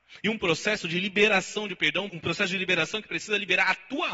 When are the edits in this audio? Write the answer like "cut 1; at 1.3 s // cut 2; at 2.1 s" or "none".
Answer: cut 1; at 2.1 s